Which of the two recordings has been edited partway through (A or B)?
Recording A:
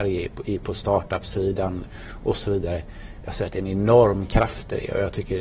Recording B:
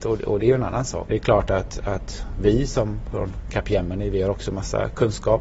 B